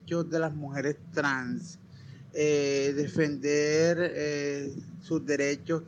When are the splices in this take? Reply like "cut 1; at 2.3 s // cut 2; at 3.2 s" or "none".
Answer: none